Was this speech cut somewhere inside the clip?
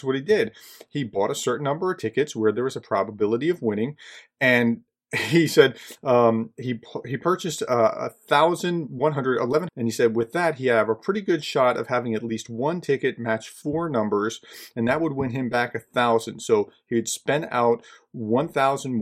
yes; 1 cut; at 9.7 s

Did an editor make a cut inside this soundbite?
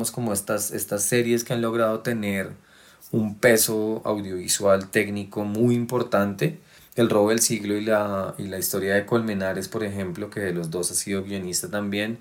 no; 0 cuts

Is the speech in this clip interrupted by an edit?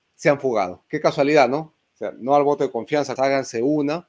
yes; 2 cuts; at 1.9 s, 3.2 s

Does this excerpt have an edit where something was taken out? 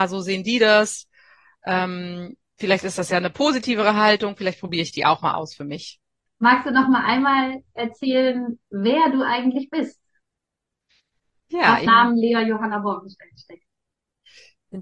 yes; 2 cuts; at 6.3 s, 11.9 s

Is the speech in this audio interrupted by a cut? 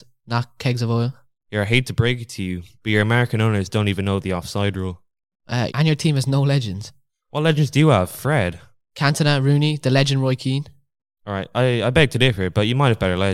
yes; 1 cut; at 5.7 s

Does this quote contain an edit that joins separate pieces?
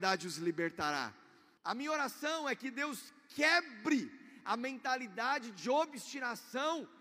yes; 1 cut; at 1.6 s

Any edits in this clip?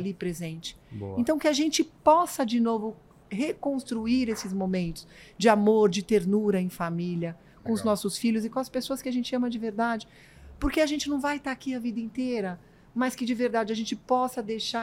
no; 0 cuts

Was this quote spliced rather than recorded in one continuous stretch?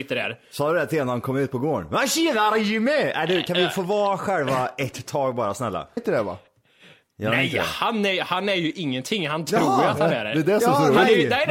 yes; 1 cut; at 6.0 s

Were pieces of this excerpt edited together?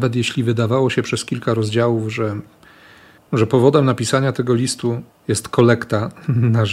no; 0 cuts

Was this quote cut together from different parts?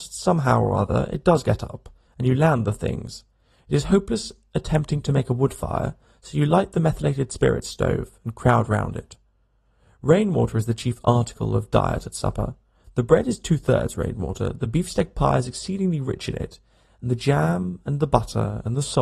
no; 0 cuts

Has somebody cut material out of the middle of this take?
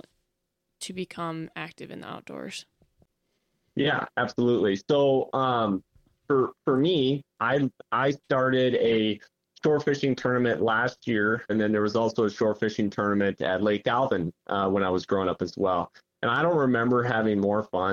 yes; 2 cuts; at 7.3 s, 11.5 s

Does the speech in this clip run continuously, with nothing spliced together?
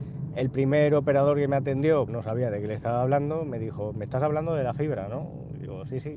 no; 1 cut; at 2.1 s

